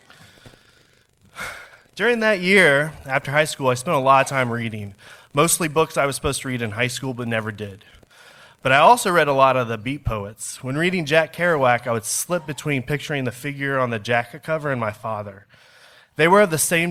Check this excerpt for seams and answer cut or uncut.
uncut